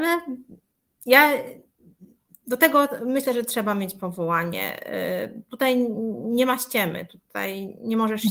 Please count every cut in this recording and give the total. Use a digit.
0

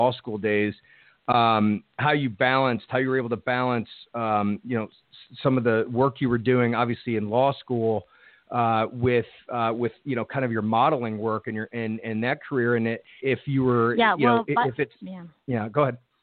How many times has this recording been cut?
1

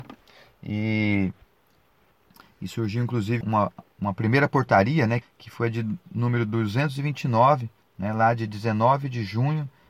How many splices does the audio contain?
2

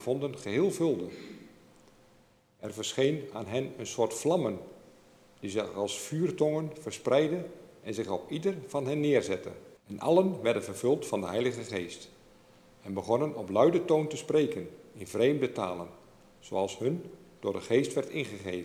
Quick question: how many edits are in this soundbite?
1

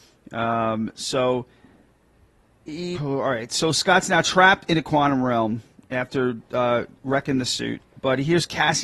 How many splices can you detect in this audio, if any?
1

